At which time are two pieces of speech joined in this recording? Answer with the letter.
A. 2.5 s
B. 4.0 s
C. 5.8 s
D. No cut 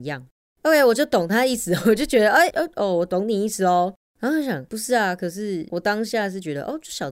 A